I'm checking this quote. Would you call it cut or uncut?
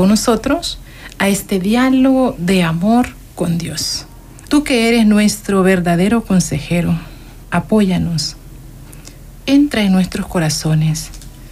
cut